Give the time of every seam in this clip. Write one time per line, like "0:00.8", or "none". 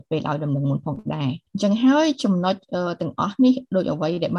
0:01.5